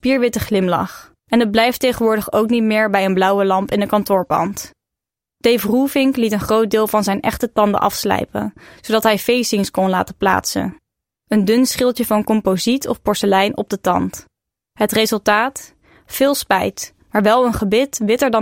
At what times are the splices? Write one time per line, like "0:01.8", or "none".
0:01.2